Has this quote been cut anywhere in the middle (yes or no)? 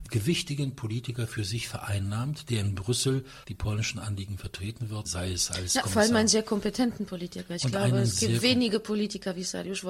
yes